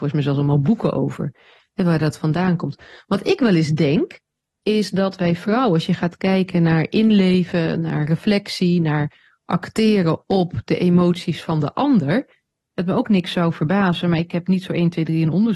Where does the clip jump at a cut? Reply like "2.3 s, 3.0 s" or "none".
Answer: none